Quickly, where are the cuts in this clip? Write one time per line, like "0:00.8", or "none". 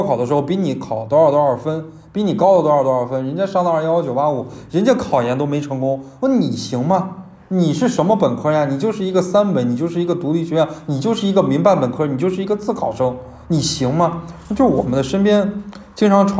none